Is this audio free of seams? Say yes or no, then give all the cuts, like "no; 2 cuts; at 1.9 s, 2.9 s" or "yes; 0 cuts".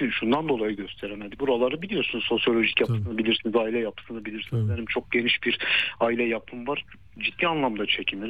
yes; 0 cuts